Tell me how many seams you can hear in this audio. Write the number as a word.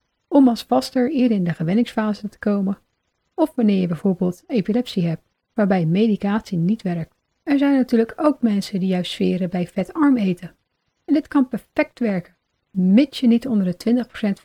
one